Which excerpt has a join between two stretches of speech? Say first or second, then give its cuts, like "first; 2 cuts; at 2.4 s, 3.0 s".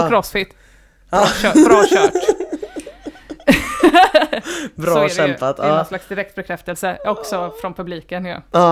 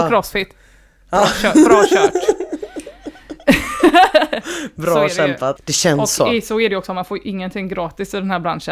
second; 1 cut; at 5.6 s